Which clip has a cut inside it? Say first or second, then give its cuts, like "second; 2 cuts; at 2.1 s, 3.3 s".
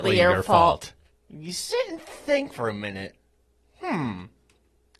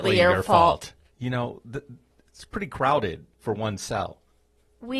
second; 1 cut; at 1.1 s